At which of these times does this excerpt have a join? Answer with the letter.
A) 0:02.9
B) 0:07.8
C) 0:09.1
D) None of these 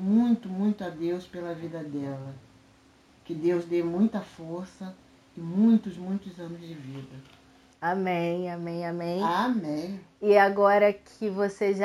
B